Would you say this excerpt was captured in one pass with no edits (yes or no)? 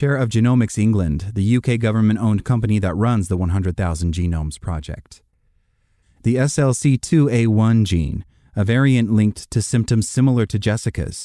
no